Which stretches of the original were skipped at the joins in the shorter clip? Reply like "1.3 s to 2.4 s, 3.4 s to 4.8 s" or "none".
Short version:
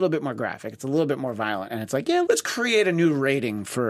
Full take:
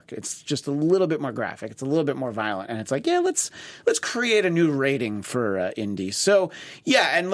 3.2 s to 3.8 s